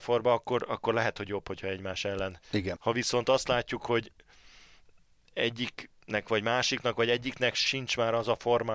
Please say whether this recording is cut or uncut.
cut